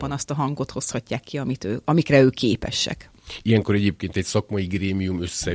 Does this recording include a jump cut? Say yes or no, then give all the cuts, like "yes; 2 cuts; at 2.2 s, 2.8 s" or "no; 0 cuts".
no; 0 cuts